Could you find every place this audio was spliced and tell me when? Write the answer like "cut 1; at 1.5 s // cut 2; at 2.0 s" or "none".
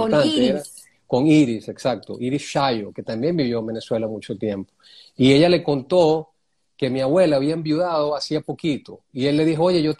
none